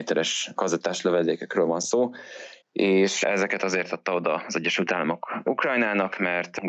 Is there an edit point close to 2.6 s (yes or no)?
yes